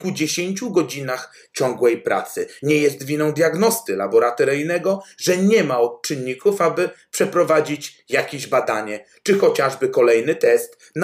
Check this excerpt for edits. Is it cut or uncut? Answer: cut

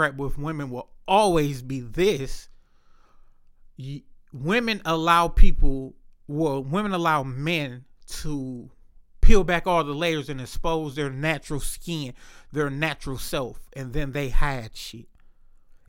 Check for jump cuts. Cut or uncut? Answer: uncut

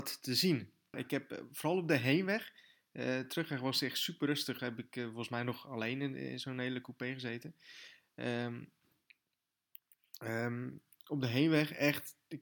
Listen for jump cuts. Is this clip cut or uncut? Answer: cut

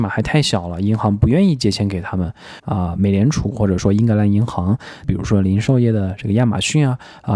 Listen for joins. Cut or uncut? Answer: cut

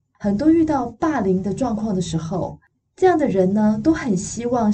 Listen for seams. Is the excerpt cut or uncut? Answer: uncut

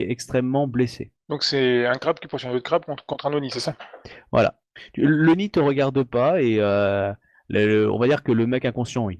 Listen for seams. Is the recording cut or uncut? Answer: uncut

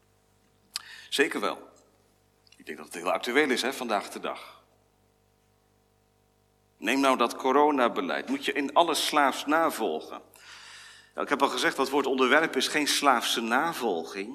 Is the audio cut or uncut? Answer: uncut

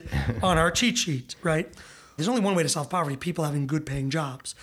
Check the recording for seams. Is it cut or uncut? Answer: cut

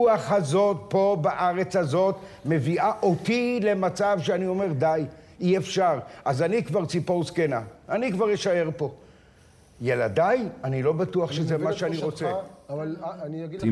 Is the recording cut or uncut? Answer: uncut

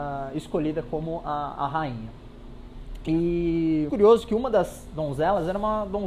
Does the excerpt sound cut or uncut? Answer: cut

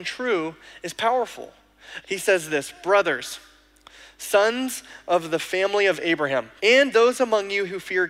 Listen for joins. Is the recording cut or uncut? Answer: cut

